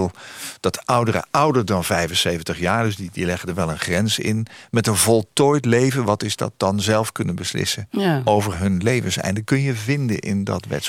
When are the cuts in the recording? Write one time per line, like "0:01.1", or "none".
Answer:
none